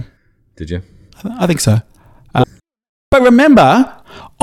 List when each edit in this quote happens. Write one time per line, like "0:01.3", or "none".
0:02.4